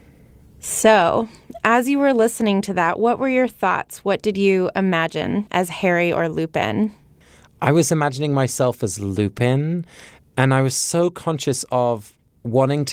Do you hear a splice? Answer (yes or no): no